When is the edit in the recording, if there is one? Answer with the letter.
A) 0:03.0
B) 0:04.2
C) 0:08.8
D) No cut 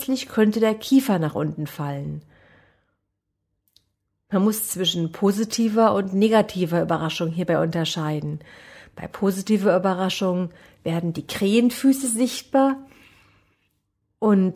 D